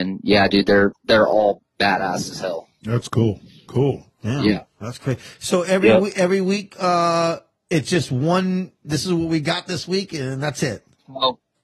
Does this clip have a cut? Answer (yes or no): yes